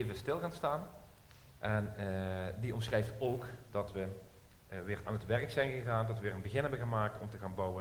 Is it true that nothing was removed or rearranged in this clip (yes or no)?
no